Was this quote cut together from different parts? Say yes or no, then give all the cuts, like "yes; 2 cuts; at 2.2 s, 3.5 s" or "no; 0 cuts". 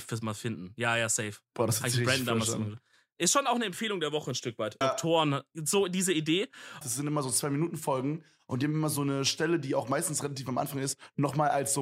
yes; 2 cuts; at 4.8 s, 6.8 s